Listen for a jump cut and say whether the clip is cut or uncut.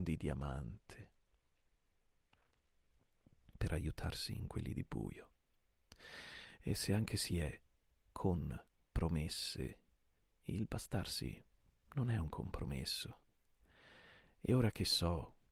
uncut